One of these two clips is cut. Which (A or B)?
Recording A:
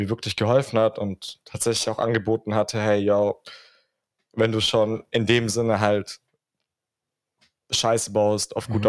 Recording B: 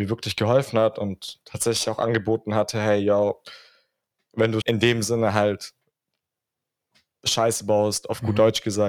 B